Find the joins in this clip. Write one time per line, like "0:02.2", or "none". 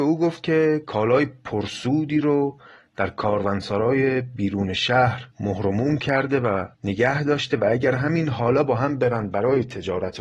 0:05.3
0:06.7